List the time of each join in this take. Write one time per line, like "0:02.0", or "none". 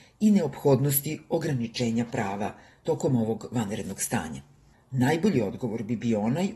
0:04.7